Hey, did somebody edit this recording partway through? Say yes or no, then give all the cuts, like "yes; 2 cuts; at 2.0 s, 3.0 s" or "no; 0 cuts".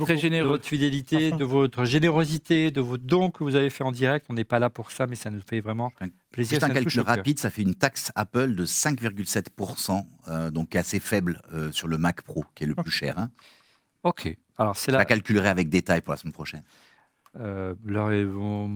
no; 0 cuts